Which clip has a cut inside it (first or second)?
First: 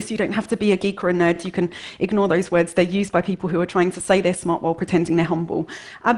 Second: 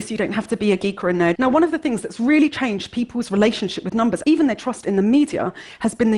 second